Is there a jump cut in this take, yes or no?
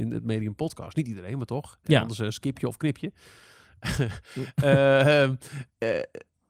no